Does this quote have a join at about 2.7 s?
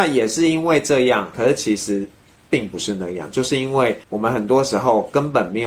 no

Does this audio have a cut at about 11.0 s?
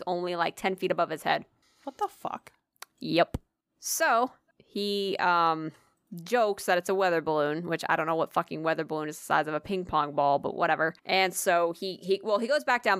yes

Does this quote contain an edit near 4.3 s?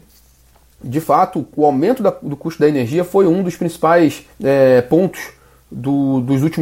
yes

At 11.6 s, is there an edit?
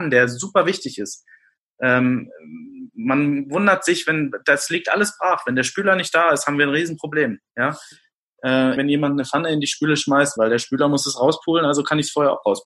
no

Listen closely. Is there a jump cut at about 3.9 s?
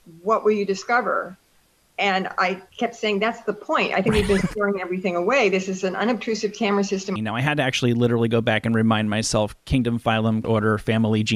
no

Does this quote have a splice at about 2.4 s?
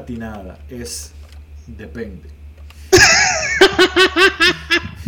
no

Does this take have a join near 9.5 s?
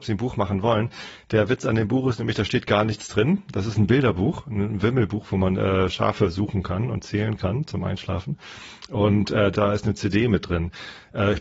yes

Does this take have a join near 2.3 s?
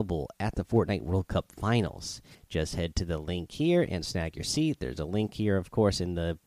yes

